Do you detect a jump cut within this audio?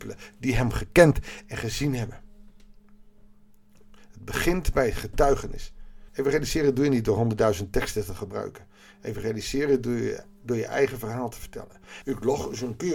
yes; 2 cuts; at 6.1 s, 12.0 s

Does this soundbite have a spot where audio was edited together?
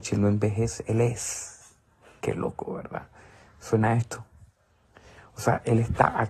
yes; 1 cut; at 2.2 s

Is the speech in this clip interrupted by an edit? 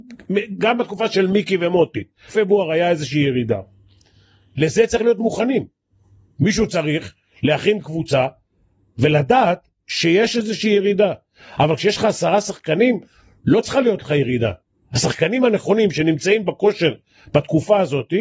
yes; 1 cut; at 2.3 s

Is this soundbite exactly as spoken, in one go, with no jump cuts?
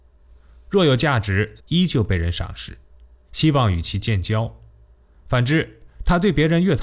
no; 1 cut; at 1.6 s

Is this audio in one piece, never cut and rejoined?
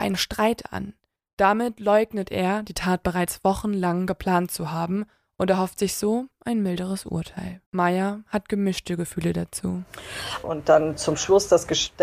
no; 2 cuts; at 7.7 s, 10.4 s

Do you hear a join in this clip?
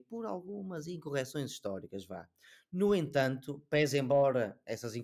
no; 0 cuts

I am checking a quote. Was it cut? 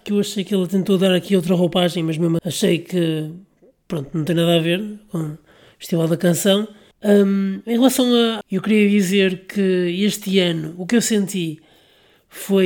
yes; 3 cuts; at 2.4 s, 6.9 s, 8.4 s

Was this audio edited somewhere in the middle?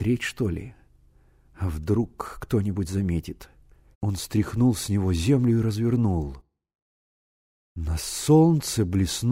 yes; 1 cut; at 3.9 s

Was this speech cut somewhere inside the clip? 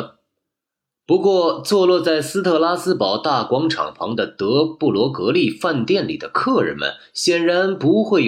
no; 0 cuts

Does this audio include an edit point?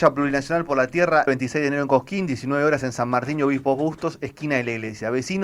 yes; 1 cut; at 1.3 s

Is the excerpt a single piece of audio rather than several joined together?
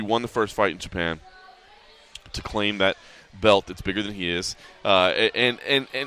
yes; 0 cuts

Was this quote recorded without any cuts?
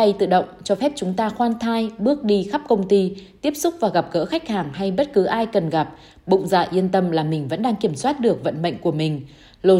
yes; 0 cuts

